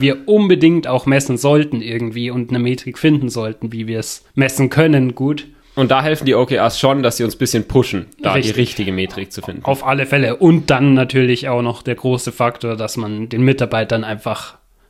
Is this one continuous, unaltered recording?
yes; 0 cuts

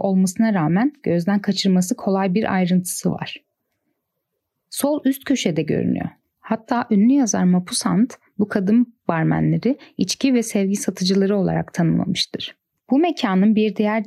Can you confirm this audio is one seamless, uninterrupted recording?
no; 2 cuts; at 6.3 s, 12.8 s

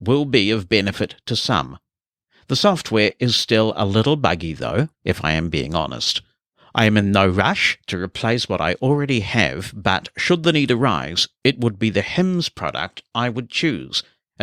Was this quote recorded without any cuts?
no; 1 cut; at 4.9 s

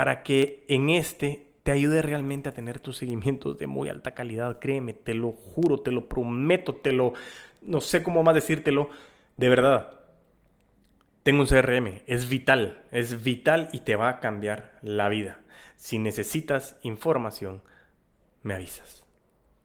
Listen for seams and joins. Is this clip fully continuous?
yes; 0 cuts

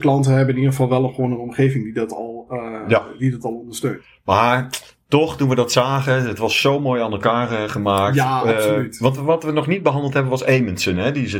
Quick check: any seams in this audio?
no; 0 cuts

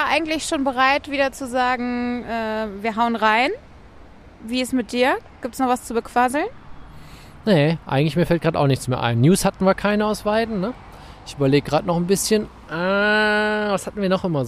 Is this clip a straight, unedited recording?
yes; 0 cuts

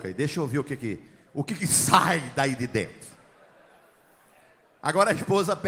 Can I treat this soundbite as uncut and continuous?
yes; 0 cuts

